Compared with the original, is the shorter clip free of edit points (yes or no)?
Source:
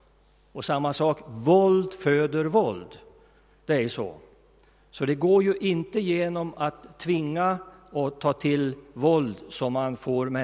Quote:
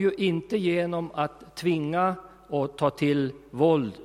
yes